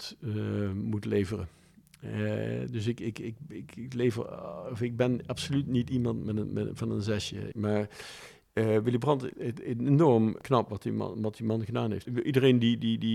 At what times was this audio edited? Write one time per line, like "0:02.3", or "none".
0:07.5